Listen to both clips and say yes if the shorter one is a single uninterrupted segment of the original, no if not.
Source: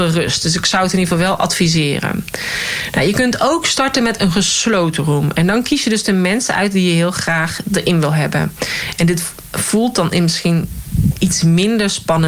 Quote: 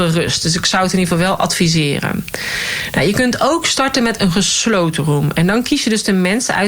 yes